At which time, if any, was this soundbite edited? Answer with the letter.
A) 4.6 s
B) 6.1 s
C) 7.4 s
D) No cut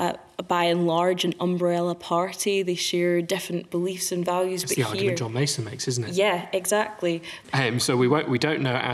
C